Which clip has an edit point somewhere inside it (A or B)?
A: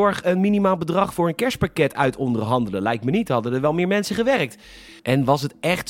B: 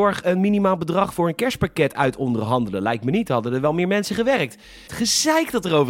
B